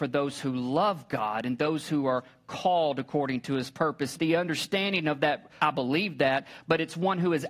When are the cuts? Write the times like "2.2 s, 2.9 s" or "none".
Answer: 4.2 s, 5.6 s